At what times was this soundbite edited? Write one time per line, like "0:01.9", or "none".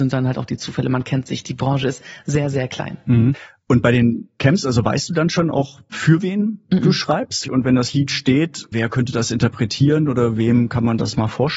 0:07.4
0:08.7